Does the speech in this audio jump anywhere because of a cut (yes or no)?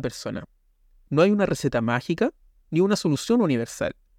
no